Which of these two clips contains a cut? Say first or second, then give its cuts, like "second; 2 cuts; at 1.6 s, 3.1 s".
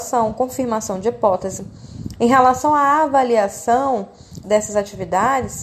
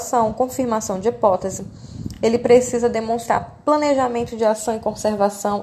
first; 2 cuts; at 2.2 s, 4.4 s